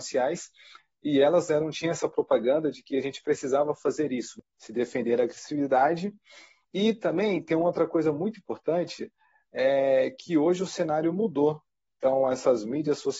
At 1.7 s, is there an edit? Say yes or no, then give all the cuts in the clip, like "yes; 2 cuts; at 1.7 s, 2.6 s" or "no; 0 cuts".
no; 0 cuts